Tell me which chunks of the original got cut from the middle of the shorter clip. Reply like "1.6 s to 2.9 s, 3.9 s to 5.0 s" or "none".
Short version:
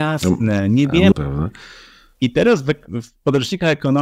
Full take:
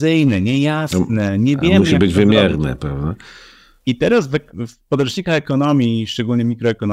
1.8 s to 2.8 s